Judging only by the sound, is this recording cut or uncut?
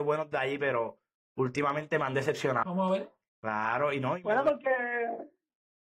cut